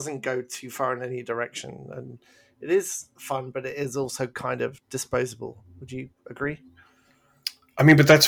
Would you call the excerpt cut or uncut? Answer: uncut